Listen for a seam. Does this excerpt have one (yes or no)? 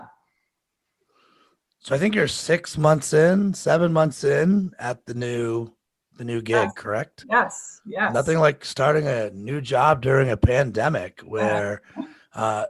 no